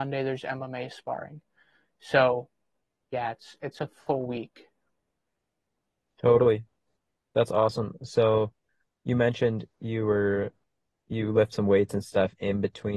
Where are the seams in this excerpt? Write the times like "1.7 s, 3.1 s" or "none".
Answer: none